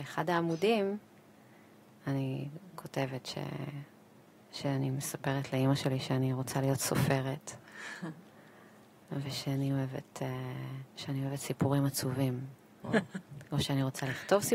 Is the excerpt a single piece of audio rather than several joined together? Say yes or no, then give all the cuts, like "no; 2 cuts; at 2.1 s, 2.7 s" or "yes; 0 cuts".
no; 2 cuts; at 10.9 s, 12.8 s